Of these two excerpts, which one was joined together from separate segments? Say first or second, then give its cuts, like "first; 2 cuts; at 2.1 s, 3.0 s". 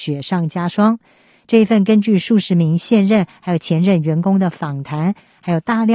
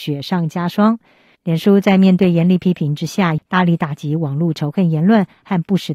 second; 2 cuts; at 1.3 s, 3.4 s